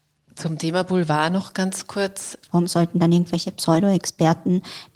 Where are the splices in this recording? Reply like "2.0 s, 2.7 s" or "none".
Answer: 2.5 s